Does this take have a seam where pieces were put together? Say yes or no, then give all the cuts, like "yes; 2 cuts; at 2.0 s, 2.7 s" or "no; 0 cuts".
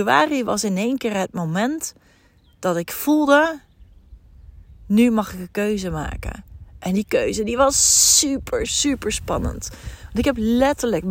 yes; 1 cut; at 8.7 s